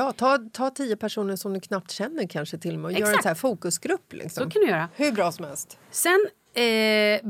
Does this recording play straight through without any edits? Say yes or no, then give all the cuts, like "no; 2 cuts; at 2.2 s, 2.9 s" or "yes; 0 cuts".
yes; 0 cuts